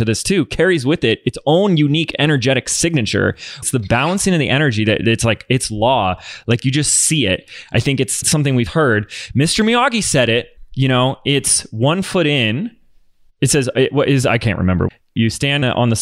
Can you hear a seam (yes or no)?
yes